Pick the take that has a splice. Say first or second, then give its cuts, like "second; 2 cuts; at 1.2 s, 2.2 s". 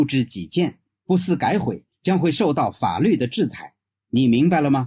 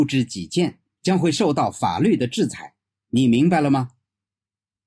second; 1 cut; at 1.0 s